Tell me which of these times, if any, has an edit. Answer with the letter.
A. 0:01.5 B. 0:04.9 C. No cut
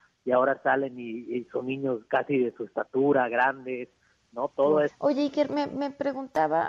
B